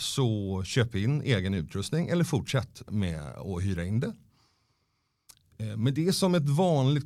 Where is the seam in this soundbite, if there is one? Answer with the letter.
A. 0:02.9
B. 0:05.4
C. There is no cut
A